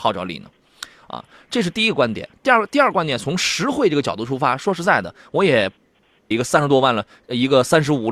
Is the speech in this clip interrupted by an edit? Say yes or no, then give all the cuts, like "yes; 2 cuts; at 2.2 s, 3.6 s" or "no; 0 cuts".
yes; 1 cut; at 6.3 s